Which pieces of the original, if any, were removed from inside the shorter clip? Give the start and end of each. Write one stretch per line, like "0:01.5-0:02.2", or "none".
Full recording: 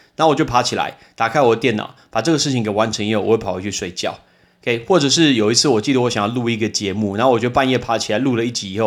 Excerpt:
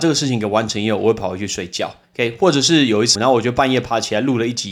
0:04.3-0:04.5
0:05.6-0:07.1